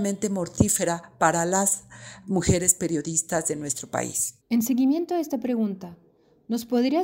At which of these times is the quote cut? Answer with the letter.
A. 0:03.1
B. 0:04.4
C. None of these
B